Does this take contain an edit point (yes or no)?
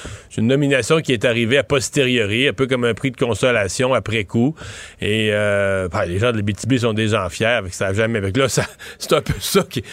no